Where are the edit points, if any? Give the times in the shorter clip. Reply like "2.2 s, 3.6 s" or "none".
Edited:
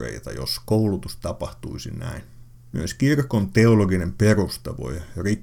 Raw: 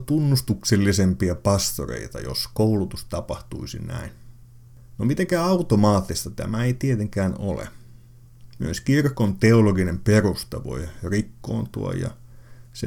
2.7 s